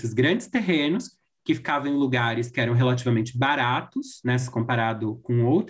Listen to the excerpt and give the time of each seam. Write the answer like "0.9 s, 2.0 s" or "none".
none